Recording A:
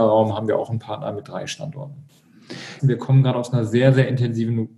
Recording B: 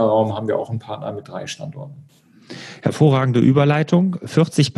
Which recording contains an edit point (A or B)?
A